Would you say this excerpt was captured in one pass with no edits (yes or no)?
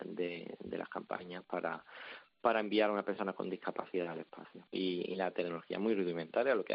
no